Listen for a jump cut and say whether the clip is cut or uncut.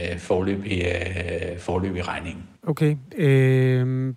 cut